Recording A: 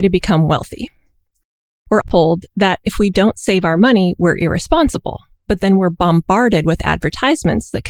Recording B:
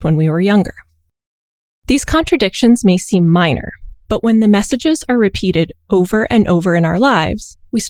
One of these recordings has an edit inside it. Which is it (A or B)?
A